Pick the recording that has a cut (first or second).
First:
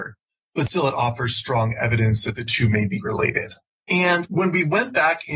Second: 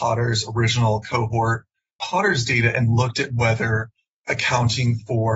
second